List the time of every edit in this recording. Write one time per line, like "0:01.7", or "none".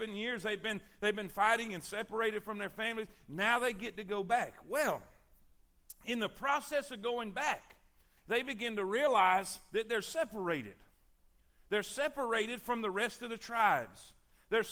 0:08.2